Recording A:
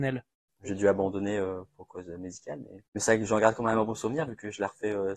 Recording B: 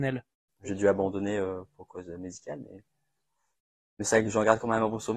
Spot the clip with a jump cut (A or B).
A